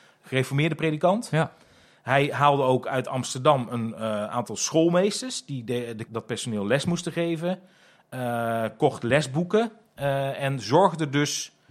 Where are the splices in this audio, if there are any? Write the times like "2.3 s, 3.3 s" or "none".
6.1 s